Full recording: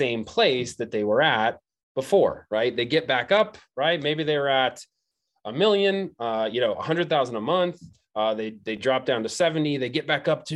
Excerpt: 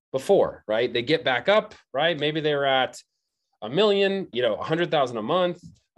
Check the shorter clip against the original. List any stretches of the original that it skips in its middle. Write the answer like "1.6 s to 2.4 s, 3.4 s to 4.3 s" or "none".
6.2 s to 6.5 s